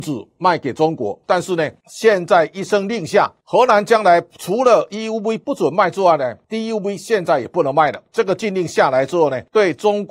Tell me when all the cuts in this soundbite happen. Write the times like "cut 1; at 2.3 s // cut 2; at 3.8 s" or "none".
cut 1; at 1.3 s